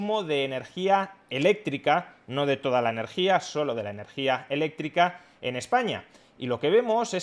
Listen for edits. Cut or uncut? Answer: uncut